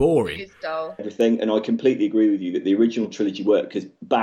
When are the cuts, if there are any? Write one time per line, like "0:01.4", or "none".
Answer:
0:01.0